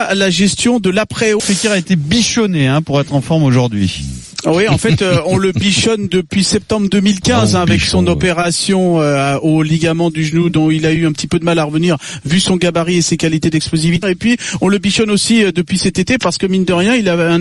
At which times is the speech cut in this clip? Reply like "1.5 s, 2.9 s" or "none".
1.4 s, 14.0 s